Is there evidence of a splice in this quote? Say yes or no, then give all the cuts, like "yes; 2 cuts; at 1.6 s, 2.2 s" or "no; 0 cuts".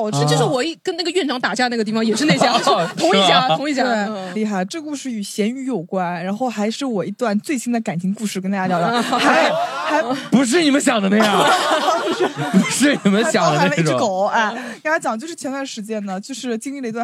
yes; 1 cut; at 4.3 s